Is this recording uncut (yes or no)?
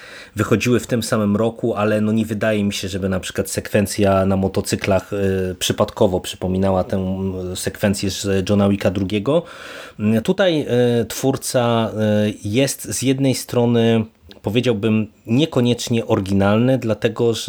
no